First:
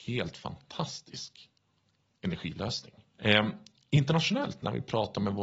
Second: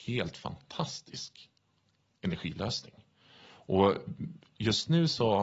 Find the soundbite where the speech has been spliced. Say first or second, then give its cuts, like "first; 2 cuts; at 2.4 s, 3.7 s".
first; 1 cut; at 3.1 s